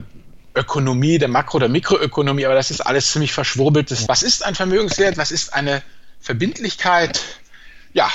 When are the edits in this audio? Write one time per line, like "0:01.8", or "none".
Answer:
0:04.1